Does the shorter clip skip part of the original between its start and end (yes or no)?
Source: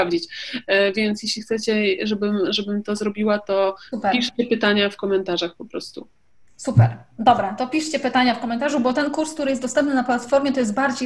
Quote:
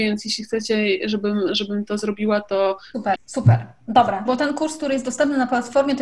yes